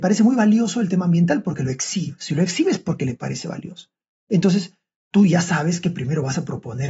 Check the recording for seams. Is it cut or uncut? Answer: uncut